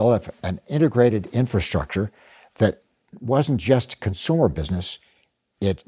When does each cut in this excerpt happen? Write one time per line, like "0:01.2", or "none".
none

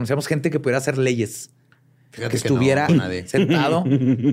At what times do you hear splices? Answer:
0:02.9

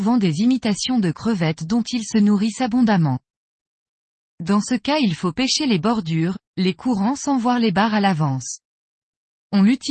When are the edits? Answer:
none

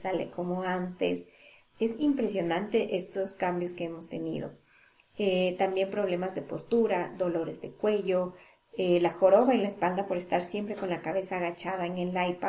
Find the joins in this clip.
none

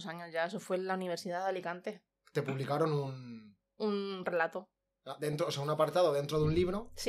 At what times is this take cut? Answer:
0:03.8

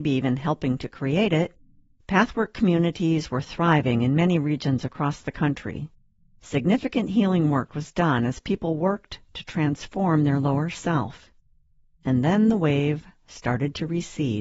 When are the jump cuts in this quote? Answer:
none

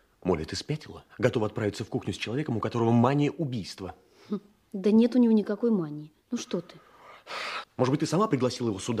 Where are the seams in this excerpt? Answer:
0:01.1
0:07.6

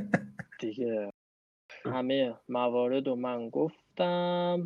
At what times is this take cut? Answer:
0:01.8

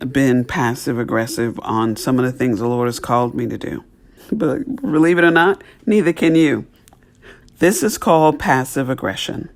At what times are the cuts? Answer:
0:04.2
0:07.4

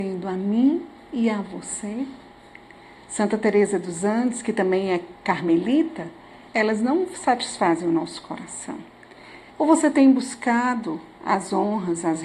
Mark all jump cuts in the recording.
0:06.5
0:09.5

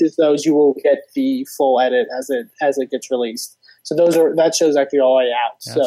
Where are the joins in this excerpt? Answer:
none

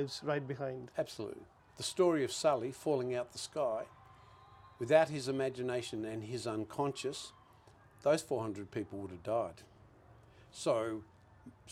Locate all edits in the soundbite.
0:01.6

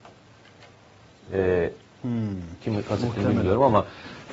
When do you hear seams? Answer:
0:02.6

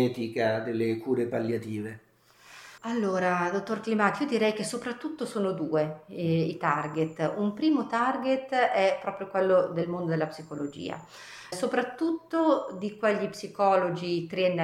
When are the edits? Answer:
0:02.8
0:11.5

